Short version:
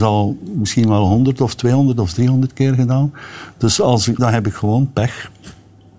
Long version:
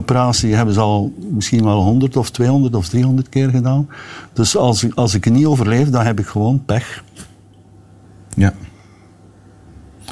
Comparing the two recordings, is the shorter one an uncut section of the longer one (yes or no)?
no